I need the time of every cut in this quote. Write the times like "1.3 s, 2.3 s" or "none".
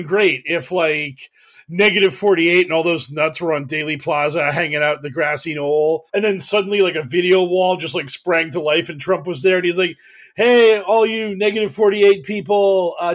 6.1 s